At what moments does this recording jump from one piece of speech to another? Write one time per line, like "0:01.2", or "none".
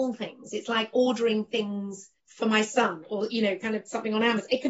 0:02.2

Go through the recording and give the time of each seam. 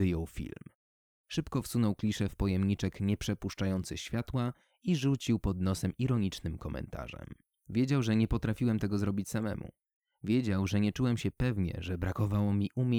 none

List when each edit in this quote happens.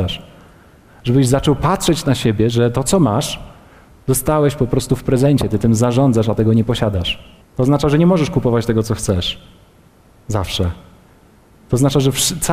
0:07.4

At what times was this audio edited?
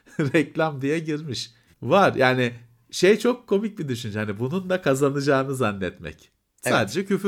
0:01.7

